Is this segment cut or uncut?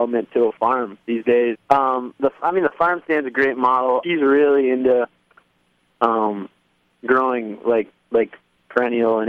cut